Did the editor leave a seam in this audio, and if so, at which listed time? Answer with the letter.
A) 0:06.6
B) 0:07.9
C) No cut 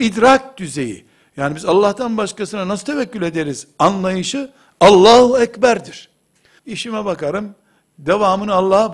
A